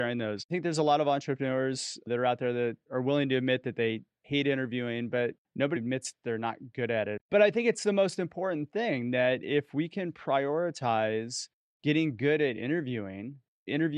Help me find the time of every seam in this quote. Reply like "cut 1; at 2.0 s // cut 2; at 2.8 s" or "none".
cut 1; at 5.8 s // cut 2; at 7.2 s